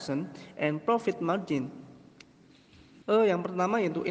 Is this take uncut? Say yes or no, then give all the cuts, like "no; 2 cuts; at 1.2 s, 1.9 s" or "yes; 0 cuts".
no; 1 cut; at 3.0 s